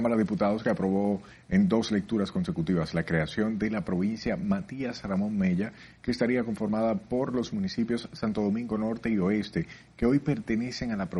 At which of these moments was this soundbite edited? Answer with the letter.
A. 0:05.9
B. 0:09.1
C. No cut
C